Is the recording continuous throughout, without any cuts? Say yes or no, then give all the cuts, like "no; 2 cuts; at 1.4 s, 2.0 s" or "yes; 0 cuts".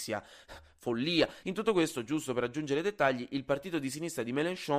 no; 1 cut; at 1.4 s